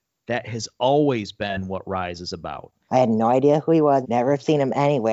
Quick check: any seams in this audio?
yes; 2 cuts; at 2.9 s, 4.0 s

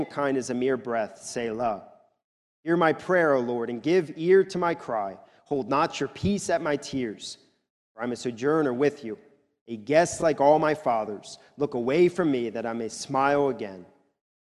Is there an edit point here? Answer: no; 0 cuts

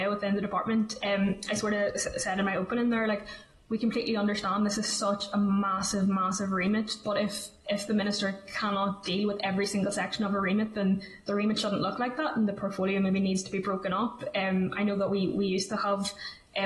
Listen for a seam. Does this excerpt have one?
no; 0 cuts

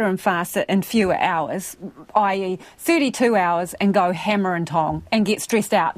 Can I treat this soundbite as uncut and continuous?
yes; 0 cuts

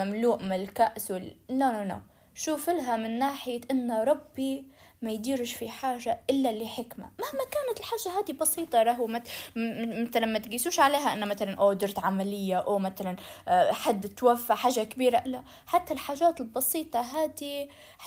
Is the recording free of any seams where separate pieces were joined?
no; 1 cut; at 15.2 s

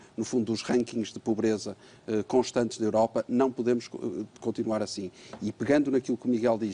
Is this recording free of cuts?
yes; 0 cuts

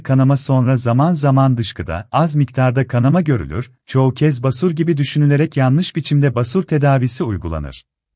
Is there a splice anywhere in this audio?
no; 0 cuts

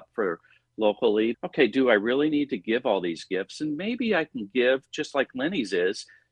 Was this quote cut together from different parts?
yes; 1 cut; at 1.3 s

